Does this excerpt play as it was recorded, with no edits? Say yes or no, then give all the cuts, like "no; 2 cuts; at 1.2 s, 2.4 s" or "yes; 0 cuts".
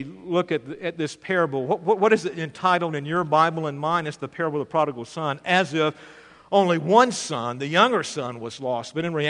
yes; 0 cuts